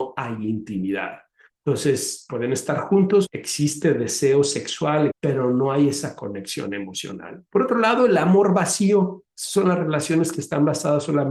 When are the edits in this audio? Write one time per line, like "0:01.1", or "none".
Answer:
0:03.3
0:05.1
0:07.5